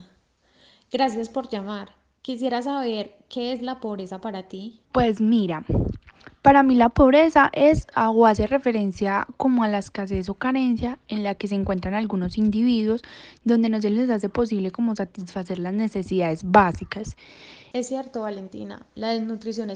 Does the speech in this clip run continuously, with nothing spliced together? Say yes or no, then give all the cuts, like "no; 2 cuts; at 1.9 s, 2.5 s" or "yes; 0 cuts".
no; 2 cuts; at 4.8 s, 17.7 s